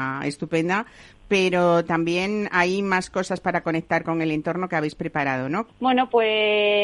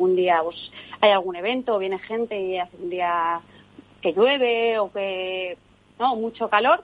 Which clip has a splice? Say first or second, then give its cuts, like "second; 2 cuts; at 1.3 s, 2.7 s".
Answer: first; 1 cut; at 5.7 s